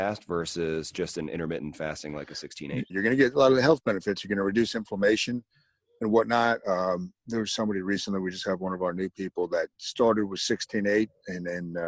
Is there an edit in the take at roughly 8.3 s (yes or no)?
no